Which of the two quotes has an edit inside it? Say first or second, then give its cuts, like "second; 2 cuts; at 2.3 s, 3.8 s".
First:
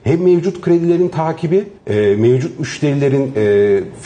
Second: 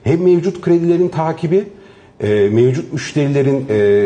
first; 1 cut; at 1.8 s